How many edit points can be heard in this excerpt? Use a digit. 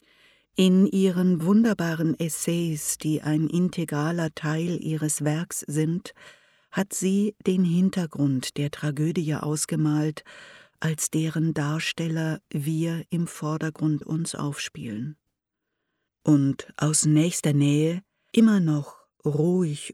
2